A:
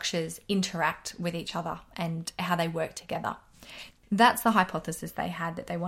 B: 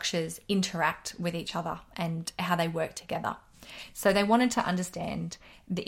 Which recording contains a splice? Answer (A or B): A